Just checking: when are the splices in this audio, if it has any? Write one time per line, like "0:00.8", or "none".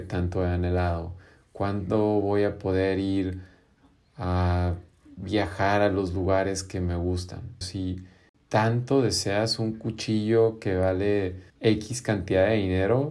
0:07.6
0:11.5

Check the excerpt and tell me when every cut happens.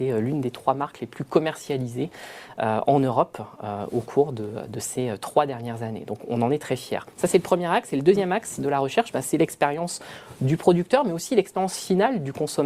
none

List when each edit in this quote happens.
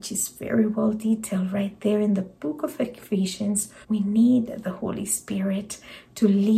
0:03.8

